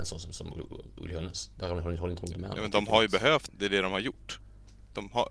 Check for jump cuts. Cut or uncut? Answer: cut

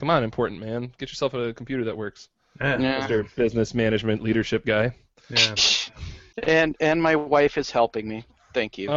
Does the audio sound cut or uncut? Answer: cut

